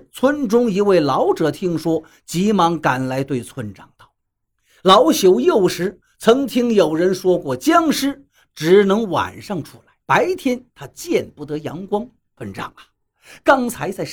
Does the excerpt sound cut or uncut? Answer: cut